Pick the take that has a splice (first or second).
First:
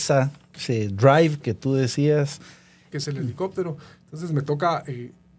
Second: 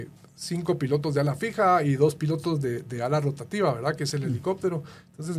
first